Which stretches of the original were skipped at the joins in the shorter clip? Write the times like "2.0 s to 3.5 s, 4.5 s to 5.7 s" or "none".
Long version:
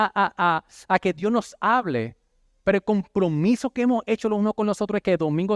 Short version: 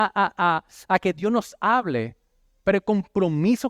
none